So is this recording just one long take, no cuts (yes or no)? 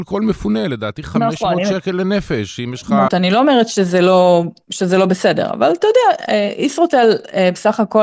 no